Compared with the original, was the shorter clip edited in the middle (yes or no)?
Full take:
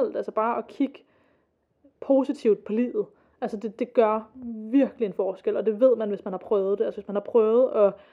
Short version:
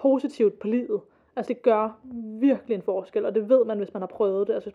yes